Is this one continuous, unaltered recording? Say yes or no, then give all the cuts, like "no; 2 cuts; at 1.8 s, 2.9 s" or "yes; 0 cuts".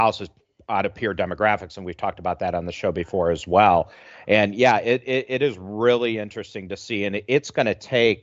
yes; 0 cuts